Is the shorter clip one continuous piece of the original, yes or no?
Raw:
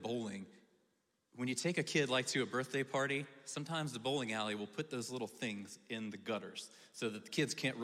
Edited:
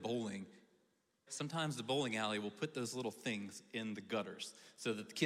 no